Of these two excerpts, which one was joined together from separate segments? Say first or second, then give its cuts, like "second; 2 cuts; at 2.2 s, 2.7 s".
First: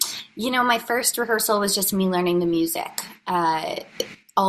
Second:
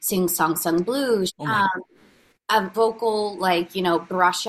second; 2 cuts; at 1.3 s, 2.7 s